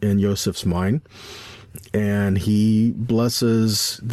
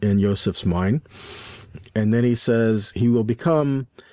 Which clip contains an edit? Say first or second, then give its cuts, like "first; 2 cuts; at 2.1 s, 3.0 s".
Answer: second; 1 cut; at 1.9 s